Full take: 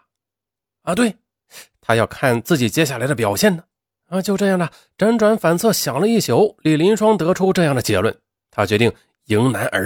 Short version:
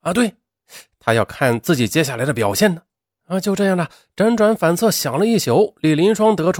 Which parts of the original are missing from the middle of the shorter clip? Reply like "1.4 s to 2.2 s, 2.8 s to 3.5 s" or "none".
none